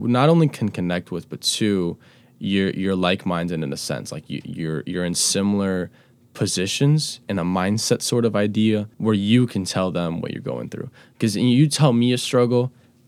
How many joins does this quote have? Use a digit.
1